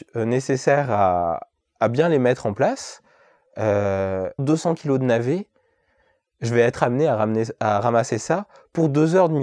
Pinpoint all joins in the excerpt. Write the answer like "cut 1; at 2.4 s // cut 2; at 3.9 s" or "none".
cut 1; at 4.4 s